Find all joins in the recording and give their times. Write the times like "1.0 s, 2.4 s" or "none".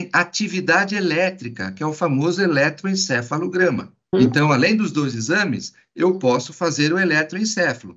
4.1 s